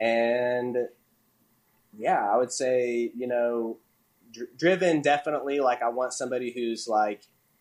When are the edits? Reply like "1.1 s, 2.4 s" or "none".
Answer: none